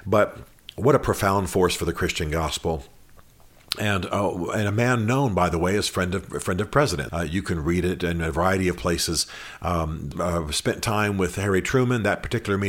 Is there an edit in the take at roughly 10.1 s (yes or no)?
yes